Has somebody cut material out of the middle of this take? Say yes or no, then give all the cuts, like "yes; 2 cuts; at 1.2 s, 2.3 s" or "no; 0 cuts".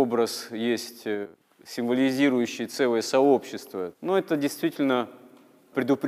yes; 1 cut; at 3.9 s